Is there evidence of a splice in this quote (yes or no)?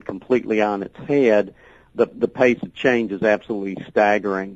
no